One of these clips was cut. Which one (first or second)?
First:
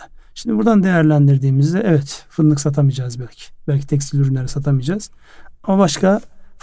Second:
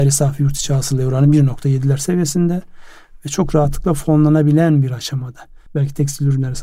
second